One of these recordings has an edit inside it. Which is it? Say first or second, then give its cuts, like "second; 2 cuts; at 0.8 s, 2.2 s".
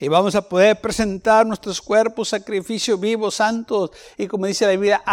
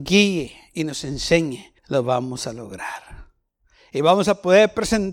second; 1 cut; at 1.8 s